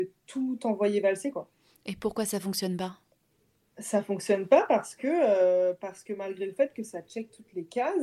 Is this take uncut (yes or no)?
yes